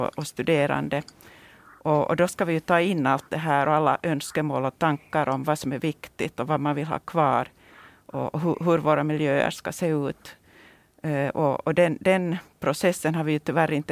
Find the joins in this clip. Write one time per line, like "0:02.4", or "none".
none

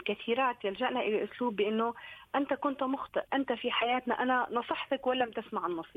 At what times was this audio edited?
0:03.3

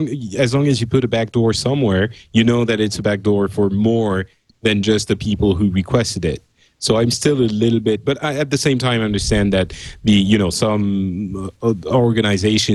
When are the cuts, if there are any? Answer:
none

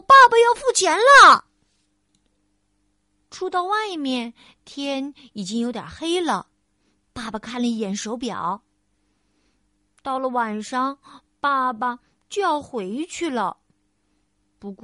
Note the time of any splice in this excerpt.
none

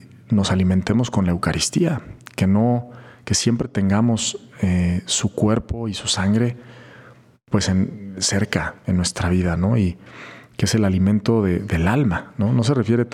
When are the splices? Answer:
none

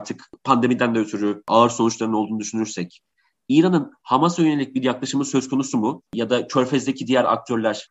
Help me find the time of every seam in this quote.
0:06.1

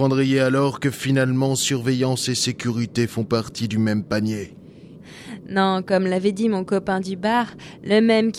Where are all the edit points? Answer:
0:05.0

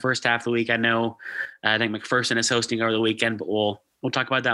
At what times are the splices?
none

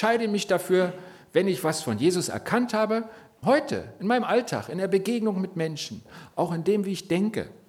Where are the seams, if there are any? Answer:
0:03.4

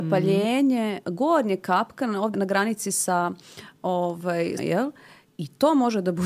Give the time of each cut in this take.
0:02.3
0:04.6

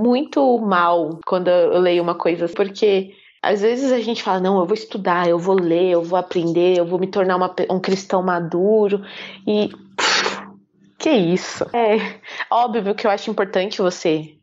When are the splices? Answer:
0:02.5
0:11.7

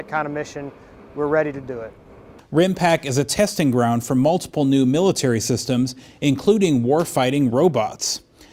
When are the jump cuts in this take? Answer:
0:02.4

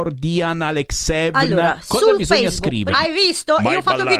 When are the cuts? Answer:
0:02.9

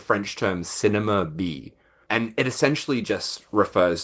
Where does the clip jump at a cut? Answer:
none

